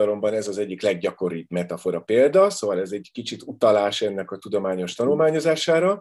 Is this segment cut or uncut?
uncut